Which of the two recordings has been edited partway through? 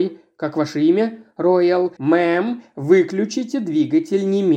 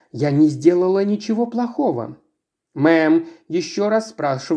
first; 1 cut; at 2.0 s

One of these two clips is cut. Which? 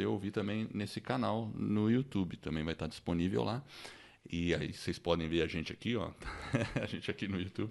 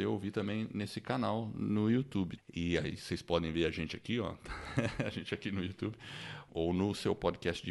second; 2 cuts; at 2.4 s, 6.5 s

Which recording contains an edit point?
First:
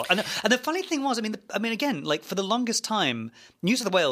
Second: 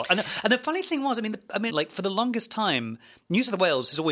second; 1 cut; at 1.7 s

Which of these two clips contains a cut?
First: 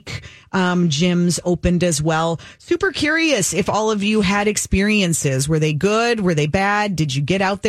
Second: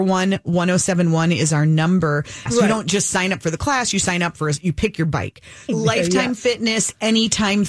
second; 2 cuts; at 2.5 s, 5.7 s

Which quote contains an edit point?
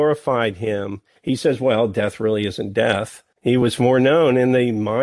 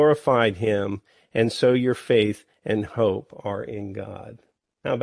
first; 2 cuts; at 1.2 s, 3.3 s

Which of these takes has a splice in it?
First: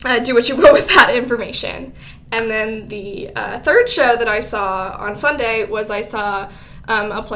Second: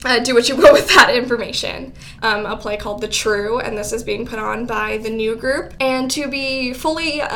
second; 1 cut; at 2.2 s

